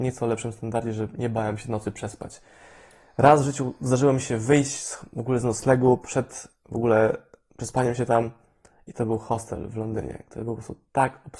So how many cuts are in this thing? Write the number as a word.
zero